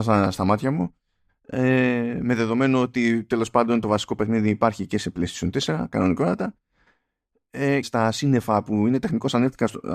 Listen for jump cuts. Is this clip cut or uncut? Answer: cut